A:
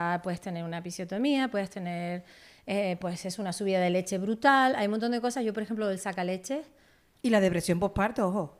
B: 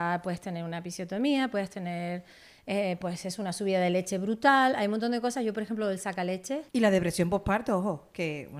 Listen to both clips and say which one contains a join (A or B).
B